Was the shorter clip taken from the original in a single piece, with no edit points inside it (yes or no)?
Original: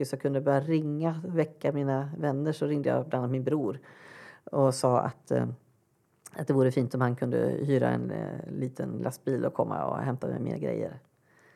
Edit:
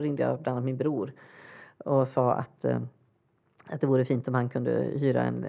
yes